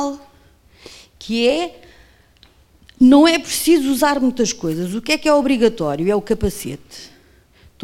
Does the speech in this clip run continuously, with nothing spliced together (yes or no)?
yes